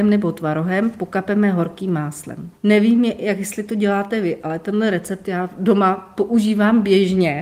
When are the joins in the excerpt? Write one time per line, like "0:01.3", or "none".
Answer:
0:02.6

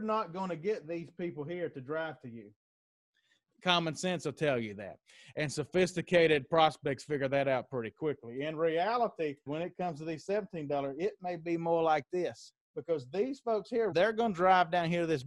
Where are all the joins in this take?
0:09.5
0:12.6
0:13.9

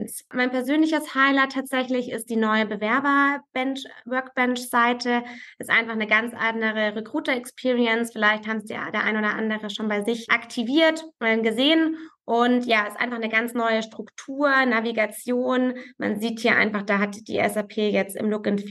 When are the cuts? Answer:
none

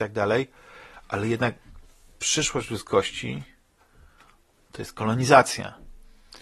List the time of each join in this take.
none

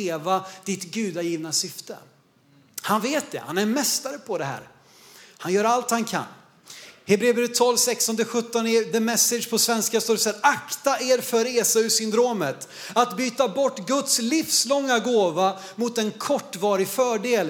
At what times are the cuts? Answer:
none

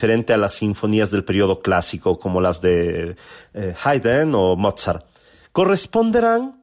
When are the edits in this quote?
0:05.4

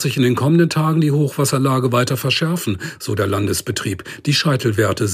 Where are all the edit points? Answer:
none

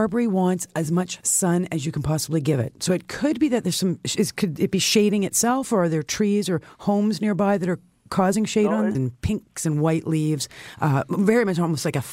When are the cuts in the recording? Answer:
0:09.0

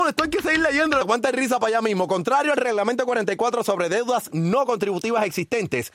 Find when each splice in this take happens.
0:01.0

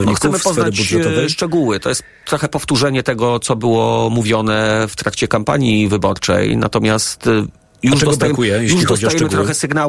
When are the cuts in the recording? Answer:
none

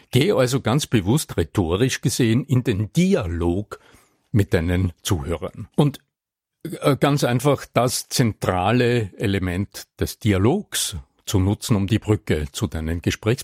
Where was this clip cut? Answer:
0:05.7

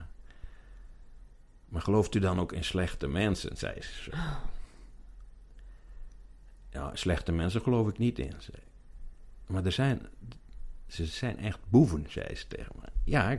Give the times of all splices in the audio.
none

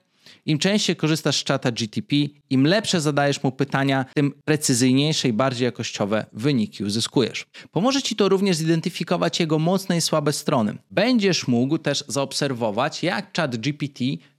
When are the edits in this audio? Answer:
none

